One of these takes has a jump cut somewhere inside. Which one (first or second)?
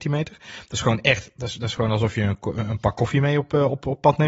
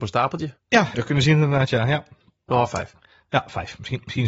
second